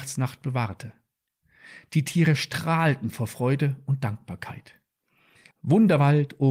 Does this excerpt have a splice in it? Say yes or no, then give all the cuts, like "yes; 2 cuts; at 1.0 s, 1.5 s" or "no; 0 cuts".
yes; 1 cut; at 5.5 s